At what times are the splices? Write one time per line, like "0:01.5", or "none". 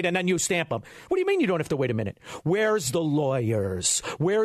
none